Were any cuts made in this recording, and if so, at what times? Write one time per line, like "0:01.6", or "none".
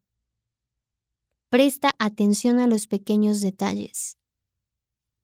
none